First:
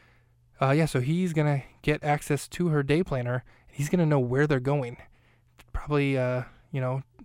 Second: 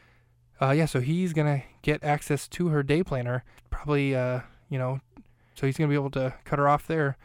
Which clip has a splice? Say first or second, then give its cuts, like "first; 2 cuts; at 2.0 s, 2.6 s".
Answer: second; 2 cuts; at 3.6 s, 5.6 s